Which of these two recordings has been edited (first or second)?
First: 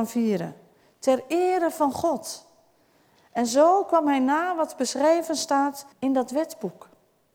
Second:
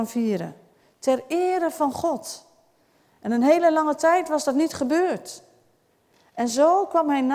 first